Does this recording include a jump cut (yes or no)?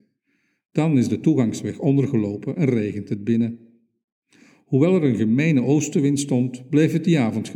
no